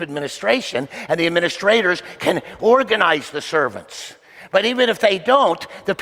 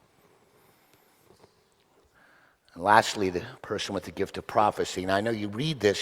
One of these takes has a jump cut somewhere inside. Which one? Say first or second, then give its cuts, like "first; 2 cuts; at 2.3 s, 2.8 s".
second; 1 cut; at 3.6 s